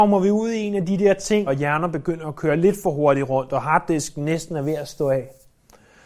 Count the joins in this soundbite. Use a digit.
1